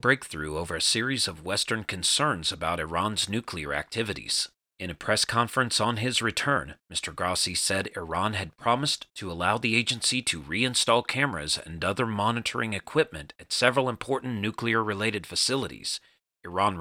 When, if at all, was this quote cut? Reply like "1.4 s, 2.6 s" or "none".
none